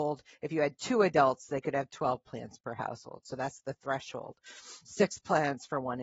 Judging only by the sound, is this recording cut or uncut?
cut